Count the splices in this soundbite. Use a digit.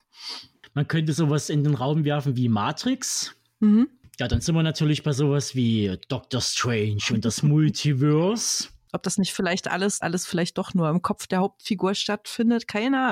2